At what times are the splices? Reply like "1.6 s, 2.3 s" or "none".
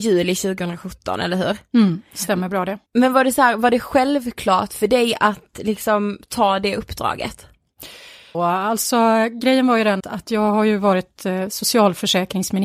2.9 s, 8.3 s, 10.0 s